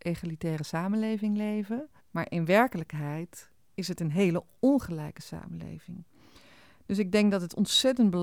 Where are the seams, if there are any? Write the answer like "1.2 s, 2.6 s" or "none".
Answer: 2.0 s